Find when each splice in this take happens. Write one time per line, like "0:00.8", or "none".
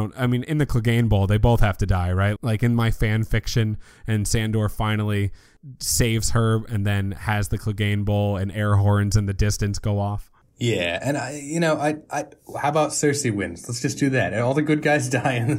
0:02.4